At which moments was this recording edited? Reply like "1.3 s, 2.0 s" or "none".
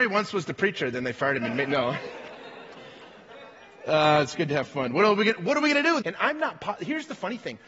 6.0 s